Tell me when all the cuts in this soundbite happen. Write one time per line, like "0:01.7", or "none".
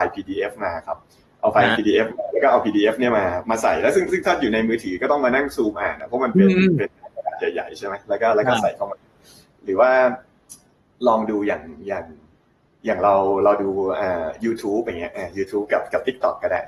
none